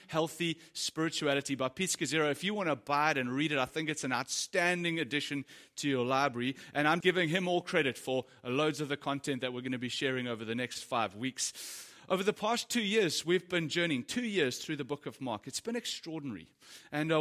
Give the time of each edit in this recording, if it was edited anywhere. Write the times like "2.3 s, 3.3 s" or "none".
7.0 s